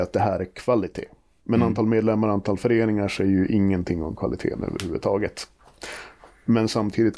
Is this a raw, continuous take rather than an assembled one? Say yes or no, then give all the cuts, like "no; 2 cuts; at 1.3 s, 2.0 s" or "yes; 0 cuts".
yes; 0 cuts